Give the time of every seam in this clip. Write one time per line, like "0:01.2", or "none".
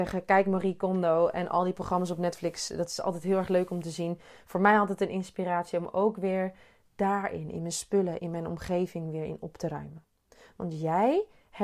0:08.2